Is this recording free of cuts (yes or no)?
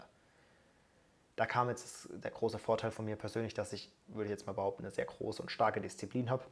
no